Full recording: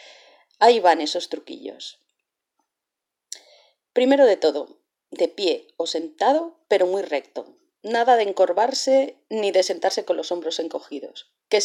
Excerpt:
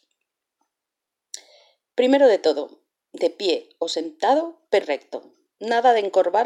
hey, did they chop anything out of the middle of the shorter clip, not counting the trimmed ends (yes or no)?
yes